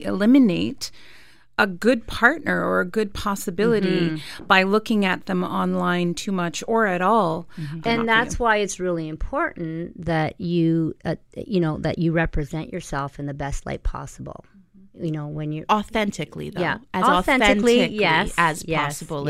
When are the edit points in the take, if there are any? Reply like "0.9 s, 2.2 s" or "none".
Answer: 7.8 s